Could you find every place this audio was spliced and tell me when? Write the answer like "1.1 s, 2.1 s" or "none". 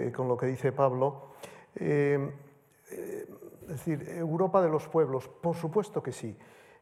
none